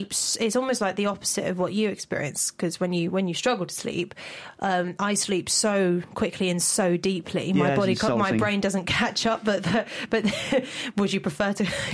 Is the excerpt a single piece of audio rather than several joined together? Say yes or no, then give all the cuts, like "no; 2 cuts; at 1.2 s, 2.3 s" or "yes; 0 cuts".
yes; 0 cuts